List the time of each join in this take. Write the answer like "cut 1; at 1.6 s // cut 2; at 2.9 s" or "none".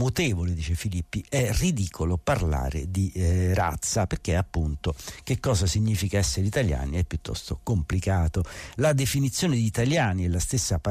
none